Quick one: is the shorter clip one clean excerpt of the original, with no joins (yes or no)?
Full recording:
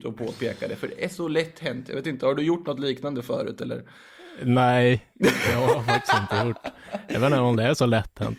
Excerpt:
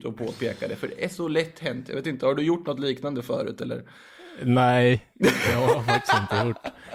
yes